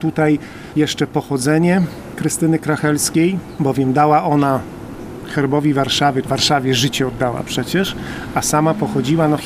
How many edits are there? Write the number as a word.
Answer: one